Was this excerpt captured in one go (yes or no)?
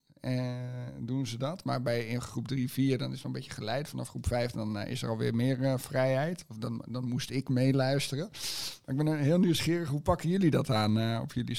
yes